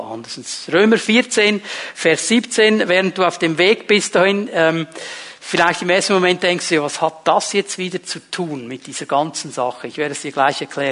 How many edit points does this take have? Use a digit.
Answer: 0